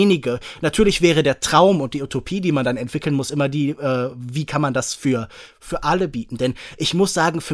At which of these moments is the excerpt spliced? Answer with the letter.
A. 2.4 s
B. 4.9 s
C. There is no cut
C